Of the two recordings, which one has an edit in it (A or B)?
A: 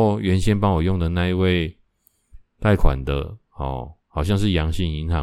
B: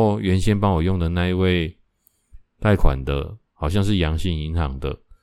B